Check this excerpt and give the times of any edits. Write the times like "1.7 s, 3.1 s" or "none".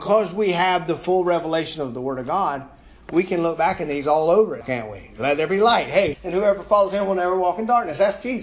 4.6 s, 6.1 s